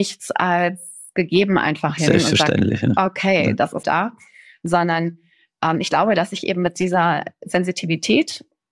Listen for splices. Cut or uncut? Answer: cut